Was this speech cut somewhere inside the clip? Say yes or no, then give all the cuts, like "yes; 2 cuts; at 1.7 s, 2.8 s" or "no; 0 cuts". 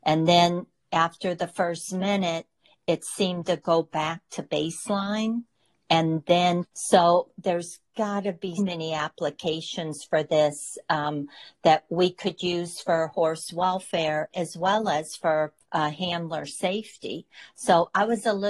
yes; 3 cuts; at 6.7 s, 8.6 s, 15.6 s